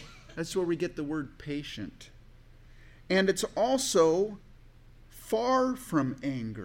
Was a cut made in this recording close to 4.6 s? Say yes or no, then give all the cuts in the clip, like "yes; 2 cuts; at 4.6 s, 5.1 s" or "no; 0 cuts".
no; 0 cuts